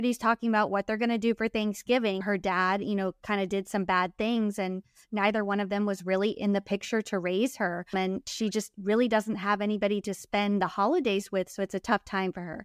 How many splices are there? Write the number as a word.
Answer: one